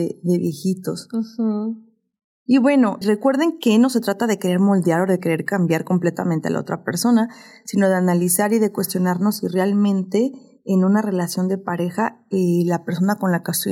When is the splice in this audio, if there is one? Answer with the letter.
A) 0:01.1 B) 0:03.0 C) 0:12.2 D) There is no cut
B